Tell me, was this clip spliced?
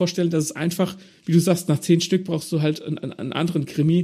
no; 0 cuts

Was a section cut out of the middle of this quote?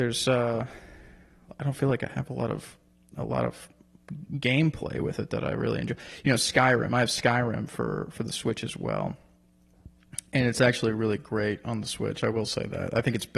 no; 0 cuts

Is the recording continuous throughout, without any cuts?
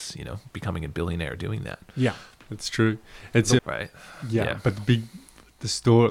no; 1 cut; at 3.6 s

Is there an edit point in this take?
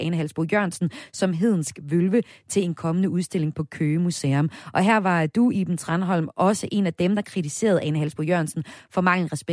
no; 0 cuts

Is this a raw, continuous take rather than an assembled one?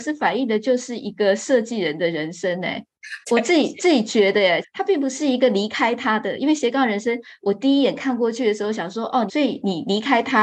no; 3 cuts; at 3.2 s, 4.6 s, 9.3 s

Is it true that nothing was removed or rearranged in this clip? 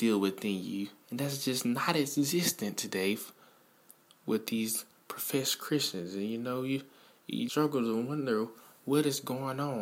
no; 2 cuts; at 1.0 s, 7.5 s

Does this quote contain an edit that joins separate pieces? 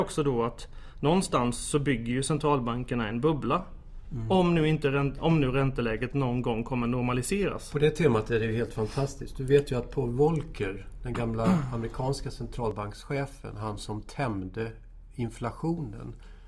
no; 0 cuts

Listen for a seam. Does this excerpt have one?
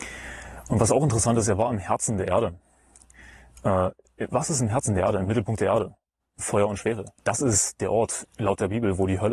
yes; 2 cuts; at 7.2 s, 8.2 s

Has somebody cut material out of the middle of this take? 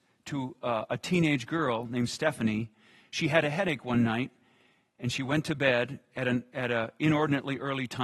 no; 0 cuts

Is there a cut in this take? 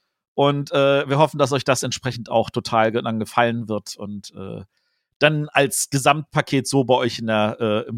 no; 0 cuts

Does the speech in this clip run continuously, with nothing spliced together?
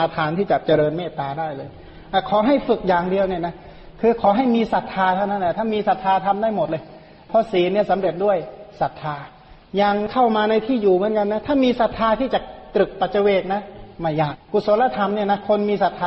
no; 1 cut; at 14.3 s

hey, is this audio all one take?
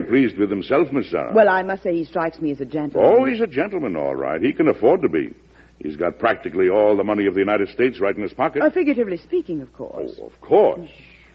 yes; 0 cuts

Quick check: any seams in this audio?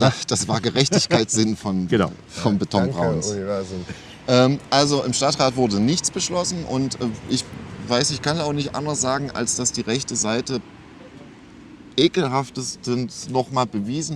yes; 1 cut; at 1.9 s

